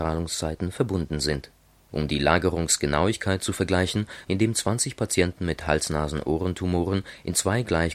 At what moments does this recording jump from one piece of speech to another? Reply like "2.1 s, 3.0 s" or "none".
1.9 s, 4.2 s